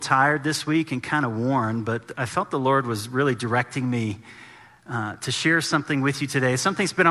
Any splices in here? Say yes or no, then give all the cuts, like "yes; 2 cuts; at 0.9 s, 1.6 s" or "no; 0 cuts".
no; 0 cuts